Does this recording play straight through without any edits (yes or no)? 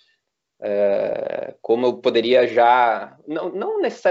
yes